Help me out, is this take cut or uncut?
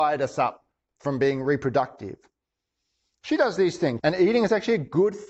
cut